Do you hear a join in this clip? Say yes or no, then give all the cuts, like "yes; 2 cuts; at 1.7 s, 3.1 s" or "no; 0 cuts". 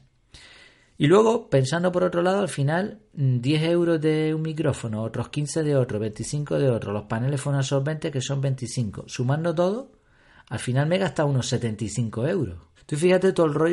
yes; 1 cut; at 12.8 s